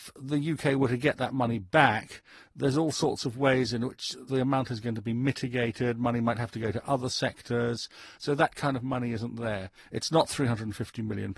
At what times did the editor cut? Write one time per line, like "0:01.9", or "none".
0:08.2
0:09.8